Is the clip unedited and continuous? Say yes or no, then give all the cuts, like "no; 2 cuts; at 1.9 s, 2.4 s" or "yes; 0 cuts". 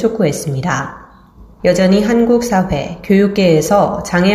no; 1 cut; at 1.6 s